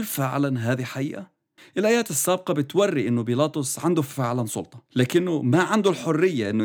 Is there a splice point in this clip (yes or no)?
yes